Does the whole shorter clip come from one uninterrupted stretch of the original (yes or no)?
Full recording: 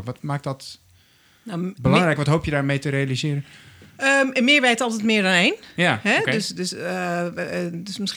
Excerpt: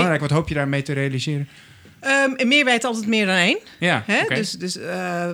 yes